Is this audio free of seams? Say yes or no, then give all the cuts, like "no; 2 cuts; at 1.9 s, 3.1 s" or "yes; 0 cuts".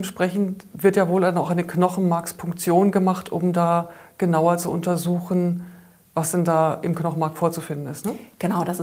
yes; 0 cuts